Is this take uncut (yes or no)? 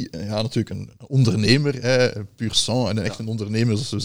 no